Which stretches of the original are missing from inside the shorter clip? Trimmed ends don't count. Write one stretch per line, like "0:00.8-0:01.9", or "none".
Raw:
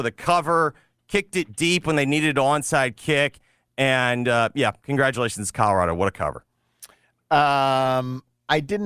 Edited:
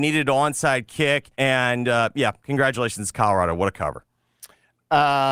0:03.4-0:03.7